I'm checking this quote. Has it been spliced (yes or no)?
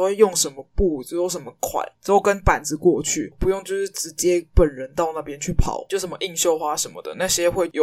yes